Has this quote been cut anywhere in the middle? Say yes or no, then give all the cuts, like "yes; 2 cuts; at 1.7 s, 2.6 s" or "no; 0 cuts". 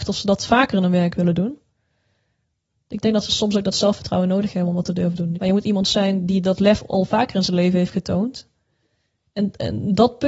yes; 2 cuts; at 5.3 s, 9.2 s